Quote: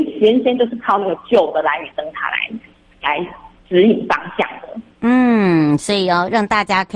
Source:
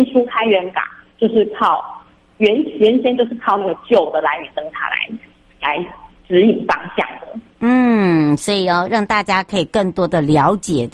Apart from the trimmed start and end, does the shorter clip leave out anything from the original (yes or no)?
no